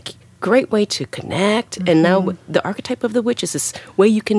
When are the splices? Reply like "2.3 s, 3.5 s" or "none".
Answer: none